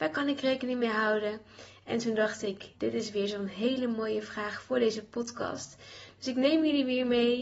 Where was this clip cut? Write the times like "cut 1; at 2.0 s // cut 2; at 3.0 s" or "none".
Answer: cut 1; at 2.7 s